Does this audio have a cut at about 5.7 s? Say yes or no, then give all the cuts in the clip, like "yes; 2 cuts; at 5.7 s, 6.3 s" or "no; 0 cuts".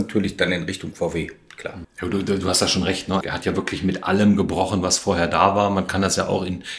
no; 2 cuts; at 1.8 s, 3.2 s